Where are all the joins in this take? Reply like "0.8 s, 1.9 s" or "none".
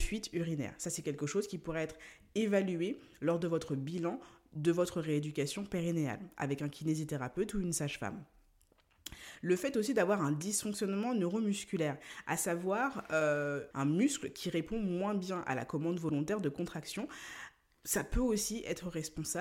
13.7 s

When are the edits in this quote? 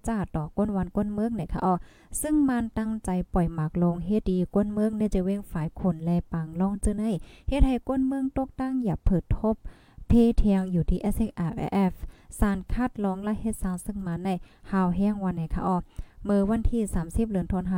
4.2 s

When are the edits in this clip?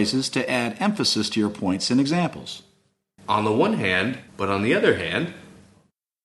3.2 s, 4.3 s

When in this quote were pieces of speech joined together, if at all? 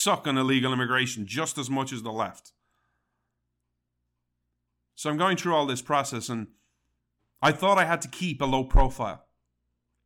none

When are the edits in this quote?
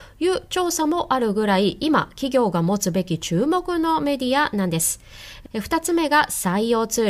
5.5 s

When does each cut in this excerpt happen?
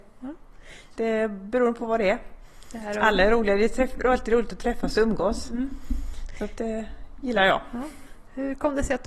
0.9 s

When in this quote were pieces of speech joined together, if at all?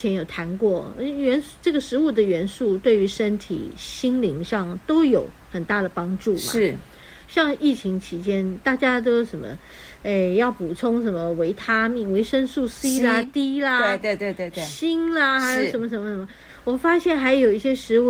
none

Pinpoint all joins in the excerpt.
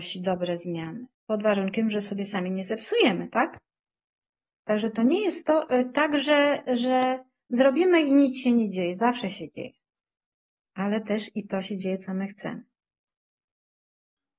1.1 s

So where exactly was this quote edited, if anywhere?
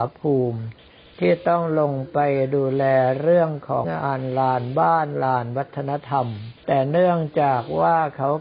3.8 s, 6.6 s

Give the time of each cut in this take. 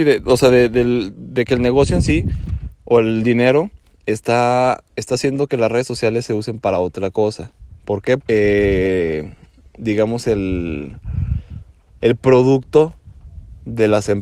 8.2 s

